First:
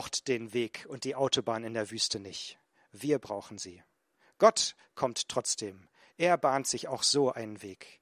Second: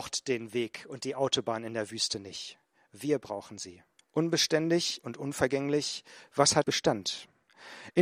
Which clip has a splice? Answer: second; 2 cuts; at 4.0 s, 6.6 s

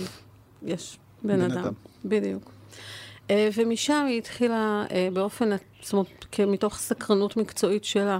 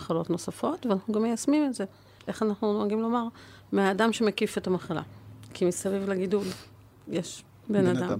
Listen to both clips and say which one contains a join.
second; 1 cut; at 2.2 s

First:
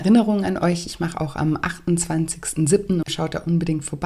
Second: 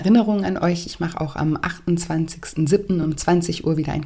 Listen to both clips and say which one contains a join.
first; 1 cut; at 3.0 s

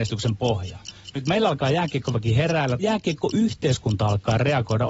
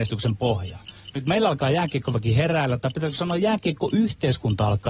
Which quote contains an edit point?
first; 1 cut; at 2.8 s

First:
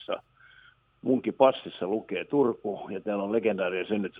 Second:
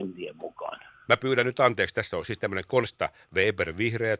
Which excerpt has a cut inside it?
second; 1 cut; at 1.1 s

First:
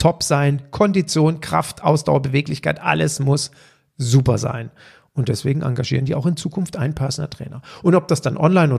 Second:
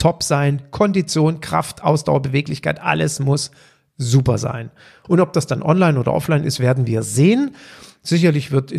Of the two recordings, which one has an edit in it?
second; 1 cut; at 5.0 s

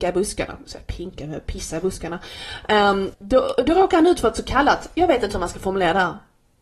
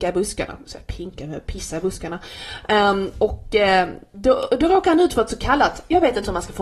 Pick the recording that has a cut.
first; 1 cut; at 3.1 s

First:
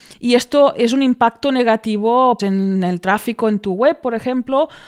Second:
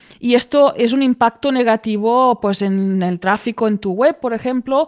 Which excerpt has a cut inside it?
first; 1 cut; at 2.4 s

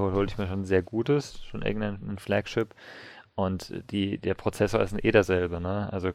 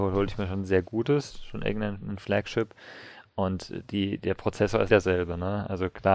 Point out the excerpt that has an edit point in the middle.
second; 1 cut; at 4.9 s

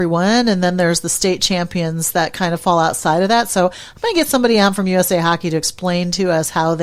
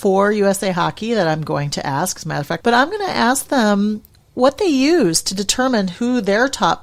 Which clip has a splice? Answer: second; 1 cut; at 2.6 s

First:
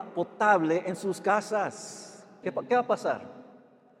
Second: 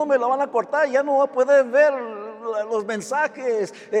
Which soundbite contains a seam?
first; 1 cut; at 2.4 s

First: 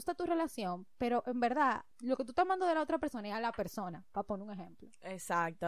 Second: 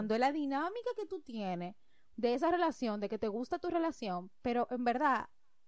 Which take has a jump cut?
first; 1 cut; at 1.9 s

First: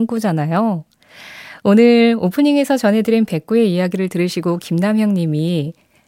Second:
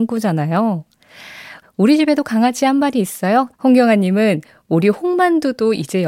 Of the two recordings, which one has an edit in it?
second; 2 cuts; at 1.6 s, 3.5 s

